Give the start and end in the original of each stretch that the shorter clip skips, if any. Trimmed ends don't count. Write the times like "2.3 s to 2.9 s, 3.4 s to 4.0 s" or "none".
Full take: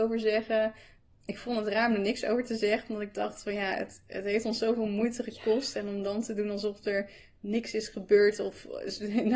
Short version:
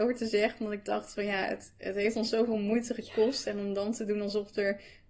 none